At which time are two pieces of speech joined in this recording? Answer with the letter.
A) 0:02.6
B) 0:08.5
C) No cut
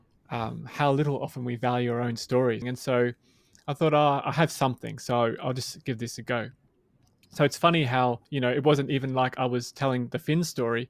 A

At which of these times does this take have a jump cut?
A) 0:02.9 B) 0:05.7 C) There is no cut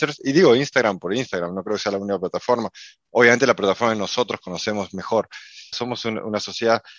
B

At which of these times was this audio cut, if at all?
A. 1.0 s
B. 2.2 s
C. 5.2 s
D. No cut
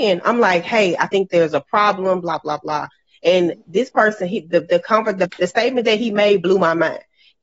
D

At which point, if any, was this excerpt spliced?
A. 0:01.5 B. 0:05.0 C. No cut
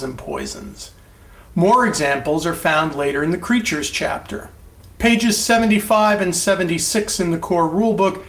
B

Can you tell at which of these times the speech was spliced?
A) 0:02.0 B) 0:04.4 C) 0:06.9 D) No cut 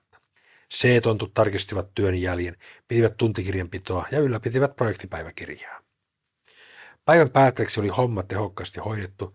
D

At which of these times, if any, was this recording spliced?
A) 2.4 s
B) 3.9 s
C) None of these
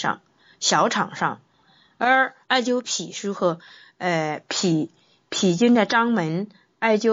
A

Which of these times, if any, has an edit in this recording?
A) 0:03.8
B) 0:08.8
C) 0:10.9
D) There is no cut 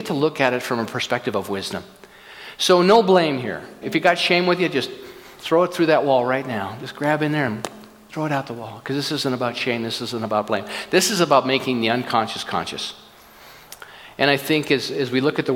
A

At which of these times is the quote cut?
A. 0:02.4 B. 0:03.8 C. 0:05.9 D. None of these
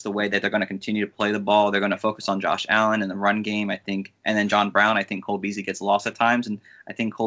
D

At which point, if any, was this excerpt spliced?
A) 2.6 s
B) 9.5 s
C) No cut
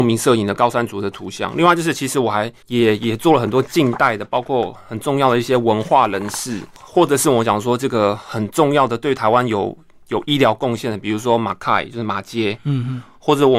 A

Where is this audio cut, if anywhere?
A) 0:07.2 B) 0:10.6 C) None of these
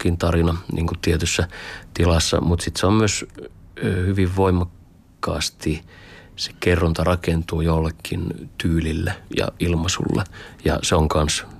C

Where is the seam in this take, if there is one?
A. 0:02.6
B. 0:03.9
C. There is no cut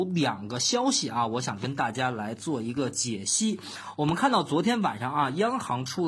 C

